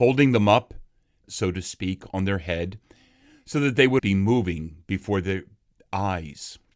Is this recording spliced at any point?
yes; 2 cuts; at 1.2 s, 4.0 s

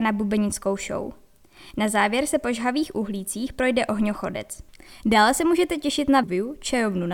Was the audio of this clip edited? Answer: yes; 1 cut; at 6.2 s

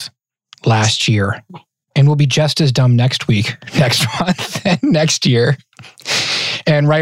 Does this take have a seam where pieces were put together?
no; 0 cuts

